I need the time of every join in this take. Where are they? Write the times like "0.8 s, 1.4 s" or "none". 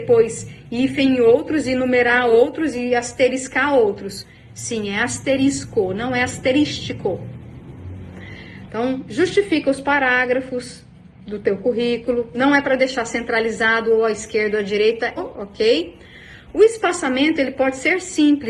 8.7 s, 15.2 s